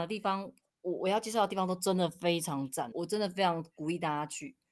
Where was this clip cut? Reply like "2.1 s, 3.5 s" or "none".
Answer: 2.9 s